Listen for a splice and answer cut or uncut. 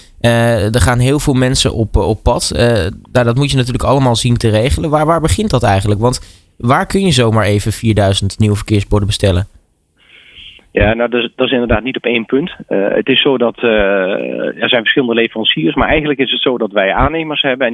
uncut